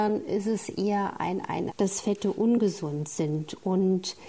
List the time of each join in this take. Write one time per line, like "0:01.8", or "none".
0:01.7